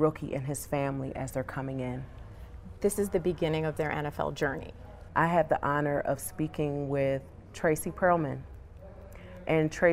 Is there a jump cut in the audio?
yes; 1 cut; at 5.1 s

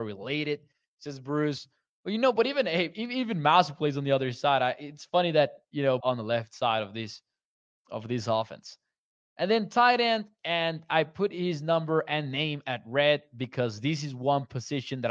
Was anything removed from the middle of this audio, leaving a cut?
yes; 1 cut; at 6.0 s

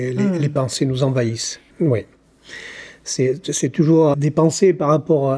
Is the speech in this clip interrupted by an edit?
yes; 2 cuts; at 1.7 s, 4.1 s

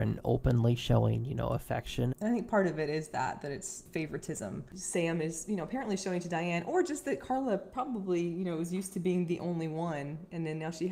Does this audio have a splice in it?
yes; 1 cut; at 2.1 s

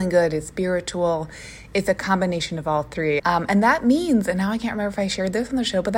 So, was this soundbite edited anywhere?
yes; 1 cut; at 3.2 s

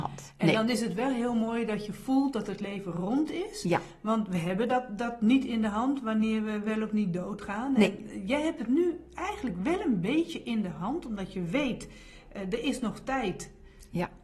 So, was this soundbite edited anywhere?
no; 0 cuts

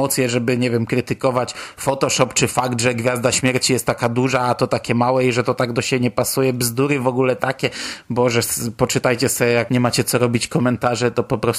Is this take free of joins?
yes; 0 cuts

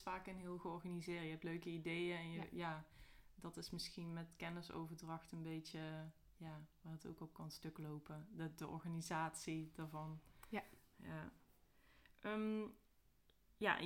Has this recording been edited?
no; 0 cuts

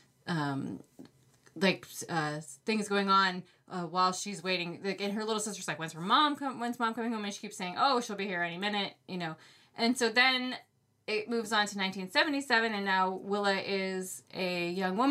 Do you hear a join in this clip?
no; 0 cuts

